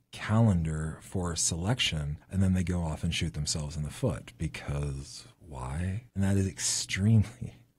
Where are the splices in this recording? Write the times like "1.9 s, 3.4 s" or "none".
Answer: 2.2 s, 6.1 s